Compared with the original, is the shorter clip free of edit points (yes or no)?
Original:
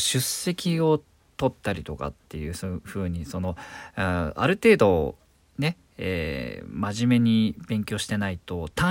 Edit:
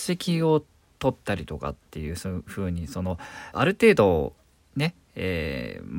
no